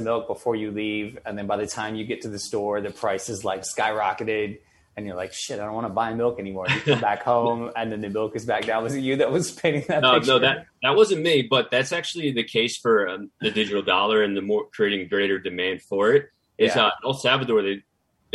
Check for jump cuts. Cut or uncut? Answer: uncut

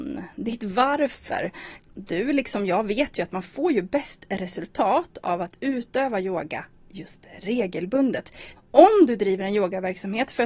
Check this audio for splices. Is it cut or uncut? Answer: cut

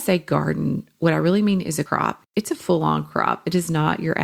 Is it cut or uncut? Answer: uncut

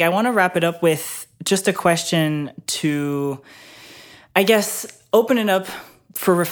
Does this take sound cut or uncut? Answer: uncut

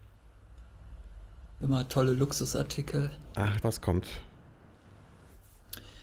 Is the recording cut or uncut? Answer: cut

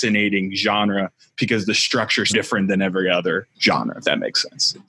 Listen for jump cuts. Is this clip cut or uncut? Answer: cut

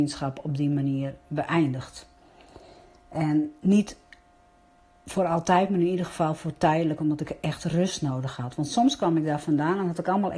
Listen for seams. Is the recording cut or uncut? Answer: uncut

